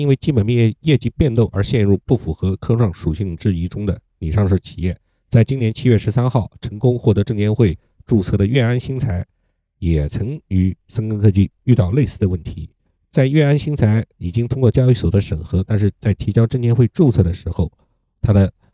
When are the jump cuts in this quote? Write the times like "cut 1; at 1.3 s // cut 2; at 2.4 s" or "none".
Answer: none